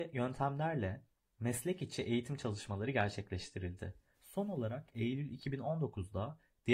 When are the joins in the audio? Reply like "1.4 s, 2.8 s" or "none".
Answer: 4.1 s